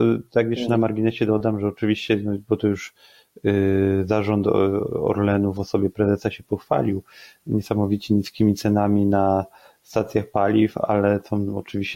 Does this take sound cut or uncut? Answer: uncut